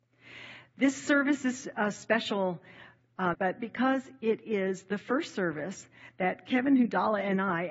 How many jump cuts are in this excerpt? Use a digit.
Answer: 1